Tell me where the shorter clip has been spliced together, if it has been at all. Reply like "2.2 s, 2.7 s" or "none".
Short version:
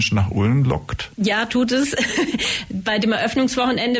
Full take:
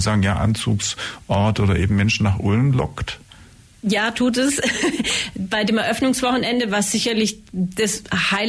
1.1 s

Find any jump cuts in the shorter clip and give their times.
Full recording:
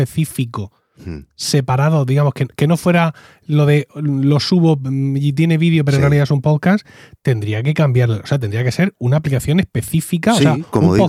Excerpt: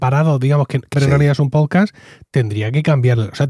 0.9 s

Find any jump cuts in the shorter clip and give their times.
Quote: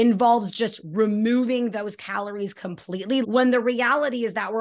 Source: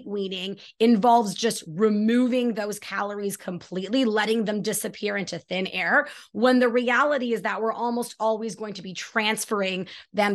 3.2 s

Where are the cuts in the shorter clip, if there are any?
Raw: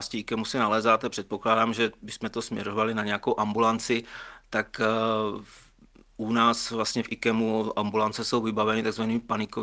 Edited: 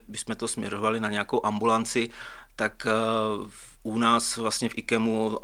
3.7 s

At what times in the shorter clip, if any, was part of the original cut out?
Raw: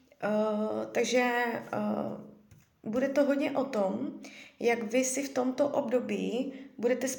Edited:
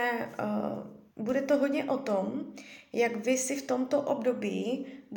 1.1 s

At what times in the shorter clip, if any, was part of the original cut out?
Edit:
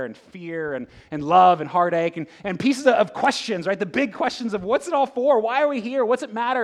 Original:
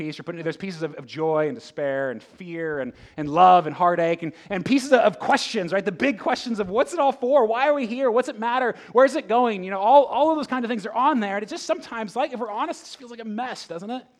none

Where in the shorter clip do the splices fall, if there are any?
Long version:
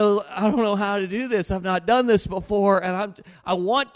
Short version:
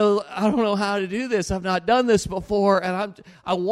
none

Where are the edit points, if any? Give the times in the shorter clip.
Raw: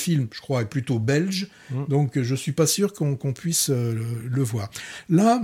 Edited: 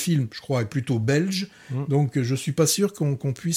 none

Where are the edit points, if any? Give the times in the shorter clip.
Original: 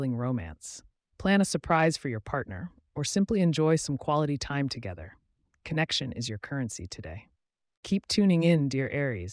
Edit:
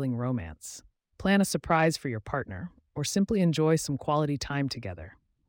none

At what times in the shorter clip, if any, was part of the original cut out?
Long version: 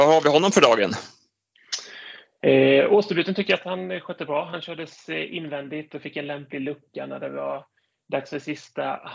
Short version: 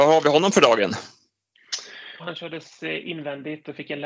2.2 s

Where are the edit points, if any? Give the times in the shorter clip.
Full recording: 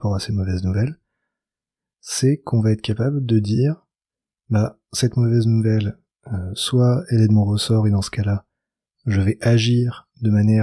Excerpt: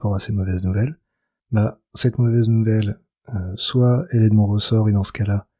1.4 s

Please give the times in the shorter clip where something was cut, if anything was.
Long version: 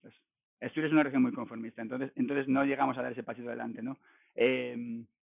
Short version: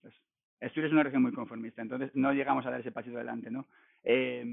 2.1 s

